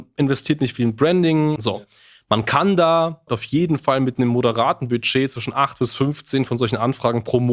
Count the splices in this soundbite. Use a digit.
2